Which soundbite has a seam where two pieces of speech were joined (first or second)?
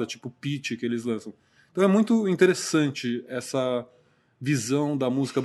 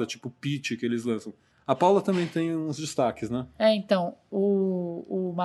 second